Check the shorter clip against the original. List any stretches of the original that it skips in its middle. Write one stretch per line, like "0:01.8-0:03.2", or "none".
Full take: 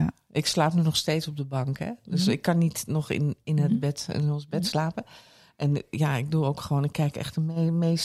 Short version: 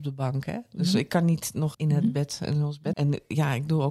0:03.1-0:03.4
0:04.6-0:05.6